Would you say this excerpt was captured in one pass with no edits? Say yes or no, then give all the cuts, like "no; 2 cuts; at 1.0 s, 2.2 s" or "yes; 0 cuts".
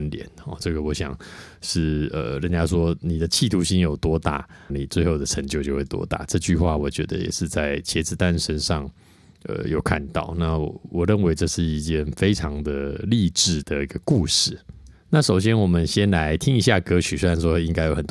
no; 2 cuts; at 4.7 s, 13.6 s